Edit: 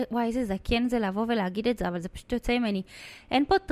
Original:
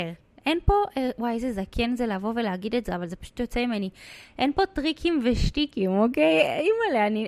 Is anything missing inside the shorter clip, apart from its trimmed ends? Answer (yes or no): no